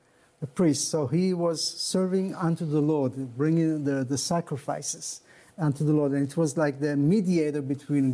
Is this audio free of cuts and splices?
yes; 0 cuts

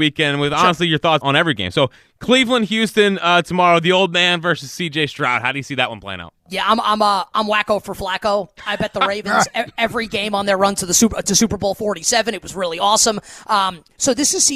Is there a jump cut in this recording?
yes; 1 cut; at 1.2 s

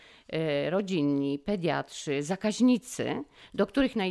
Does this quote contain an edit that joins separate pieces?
no; 0 cuts

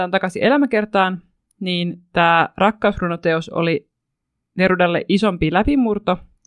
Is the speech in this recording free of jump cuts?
yes; 0 cuts

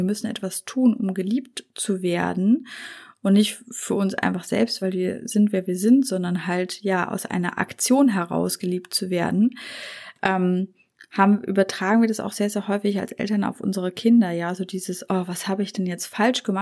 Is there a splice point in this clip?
no; 0 cuts

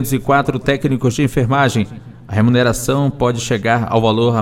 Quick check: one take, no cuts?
yes; 0 cuts

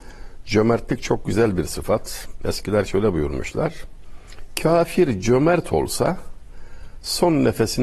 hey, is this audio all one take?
yes; 0 cuts

